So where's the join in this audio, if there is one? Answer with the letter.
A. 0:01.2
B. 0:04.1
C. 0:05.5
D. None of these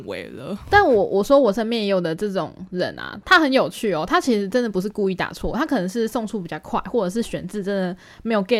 D